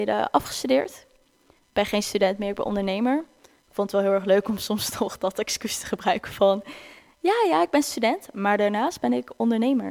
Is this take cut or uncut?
uncut